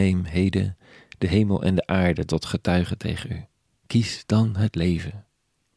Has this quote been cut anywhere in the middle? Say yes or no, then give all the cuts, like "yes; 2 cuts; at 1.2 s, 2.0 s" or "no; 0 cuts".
yes; 1 cut; at 3.7 s